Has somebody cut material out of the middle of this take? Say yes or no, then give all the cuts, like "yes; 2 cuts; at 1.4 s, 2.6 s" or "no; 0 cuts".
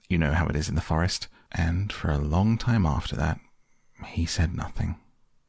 yes; 1 cut; at 1.5 s